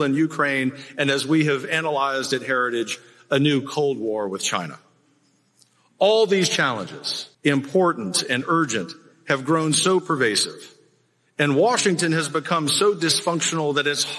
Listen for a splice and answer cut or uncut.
cut